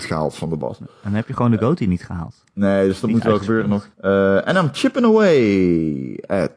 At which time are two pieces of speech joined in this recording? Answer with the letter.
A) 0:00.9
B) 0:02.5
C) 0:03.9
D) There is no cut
C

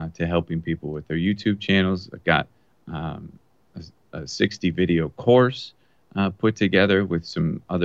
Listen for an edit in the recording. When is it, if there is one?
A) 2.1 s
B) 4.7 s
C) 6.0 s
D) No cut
D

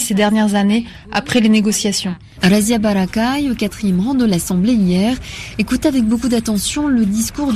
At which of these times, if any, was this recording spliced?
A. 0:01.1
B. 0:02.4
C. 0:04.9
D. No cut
B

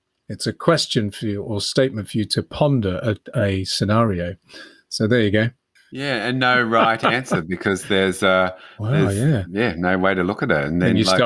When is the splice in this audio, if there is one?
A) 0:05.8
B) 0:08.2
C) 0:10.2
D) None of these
A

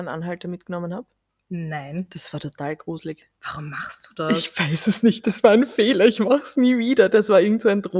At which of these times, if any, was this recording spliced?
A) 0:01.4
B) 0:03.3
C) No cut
C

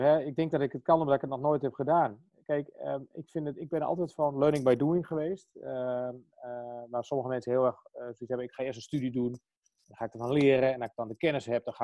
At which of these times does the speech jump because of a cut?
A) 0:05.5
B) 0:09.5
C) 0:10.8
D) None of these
D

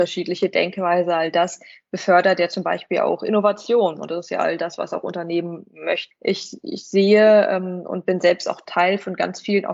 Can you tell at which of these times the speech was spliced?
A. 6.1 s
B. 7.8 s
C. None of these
A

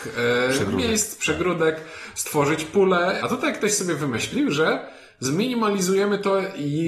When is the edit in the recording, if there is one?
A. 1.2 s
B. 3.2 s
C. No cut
B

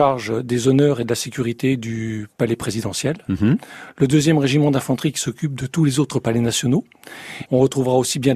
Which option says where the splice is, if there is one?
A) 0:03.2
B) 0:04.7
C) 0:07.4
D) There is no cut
C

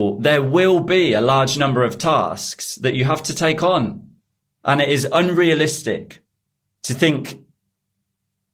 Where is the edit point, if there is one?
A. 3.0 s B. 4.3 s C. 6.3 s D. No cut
D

